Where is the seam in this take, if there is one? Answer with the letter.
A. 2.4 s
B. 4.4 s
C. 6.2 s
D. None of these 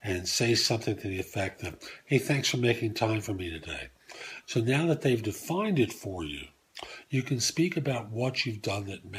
B